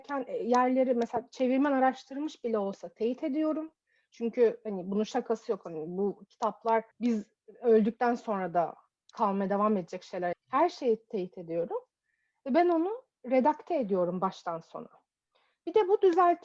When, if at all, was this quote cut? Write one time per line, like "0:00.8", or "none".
0:06.9
0:10.3